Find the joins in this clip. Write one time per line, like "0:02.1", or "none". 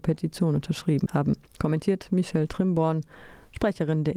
0:01.5